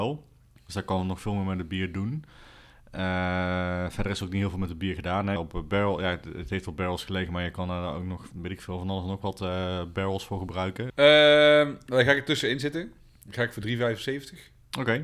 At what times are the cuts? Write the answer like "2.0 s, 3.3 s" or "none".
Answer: 5.4 s, 10.9 s